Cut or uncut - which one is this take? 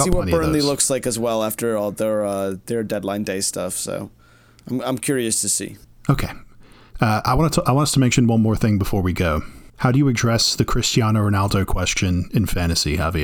cut